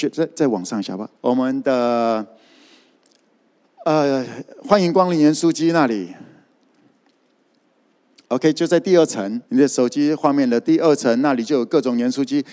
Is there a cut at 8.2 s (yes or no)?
no